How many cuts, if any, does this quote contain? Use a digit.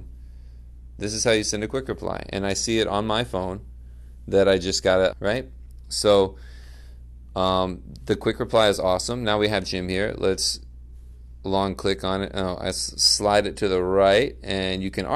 1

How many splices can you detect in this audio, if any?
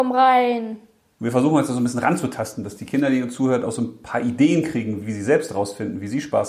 2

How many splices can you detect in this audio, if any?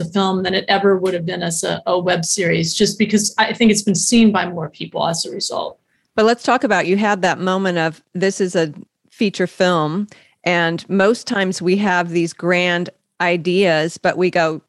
0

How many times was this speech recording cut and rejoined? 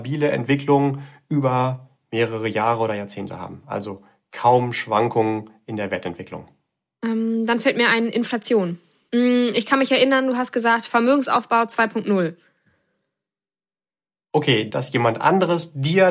2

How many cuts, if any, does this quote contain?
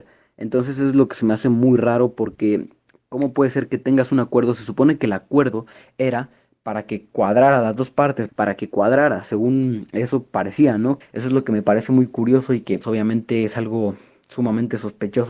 3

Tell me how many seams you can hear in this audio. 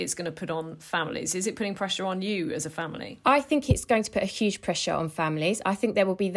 0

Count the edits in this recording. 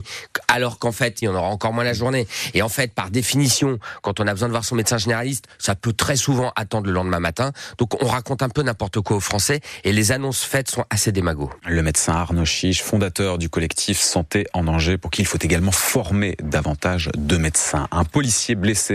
1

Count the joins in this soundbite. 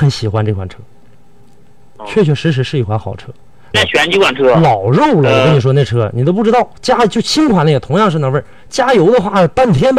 1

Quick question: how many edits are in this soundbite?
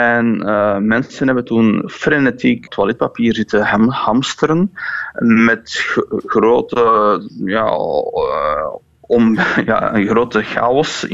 1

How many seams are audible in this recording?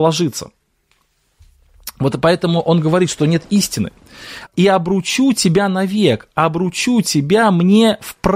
1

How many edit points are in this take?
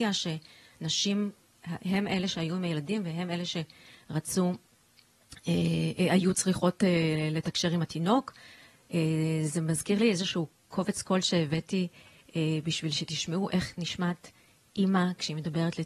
0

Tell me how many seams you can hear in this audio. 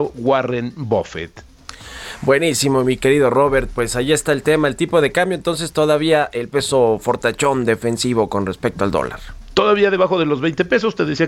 0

